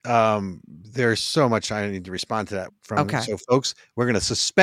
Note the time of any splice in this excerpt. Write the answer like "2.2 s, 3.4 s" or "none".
2.7 s